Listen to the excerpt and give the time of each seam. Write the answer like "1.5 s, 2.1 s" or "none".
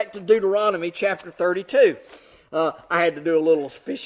none